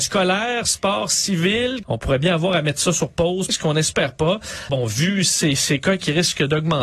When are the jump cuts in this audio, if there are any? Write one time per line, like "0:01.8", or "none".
0:01.8
0:03.5
0:04.7